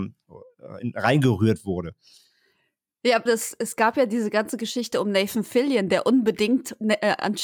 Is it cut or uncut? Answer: cut